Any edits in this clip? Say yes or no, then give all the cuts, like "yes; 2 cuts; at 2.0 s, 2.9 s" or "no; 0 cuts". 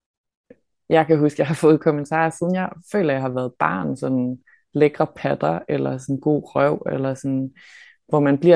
no; 0 cuts